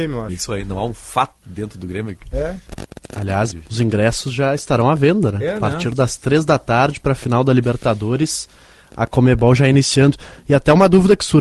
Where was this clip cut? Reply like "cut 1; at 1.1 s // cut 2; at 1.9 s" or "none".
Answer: cut 1; at 3.5 s